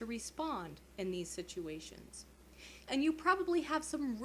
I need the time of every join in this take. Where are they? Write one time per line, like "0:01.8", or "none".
0:02.9